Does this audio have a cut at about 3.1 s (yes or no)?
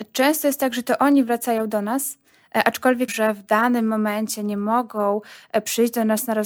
yes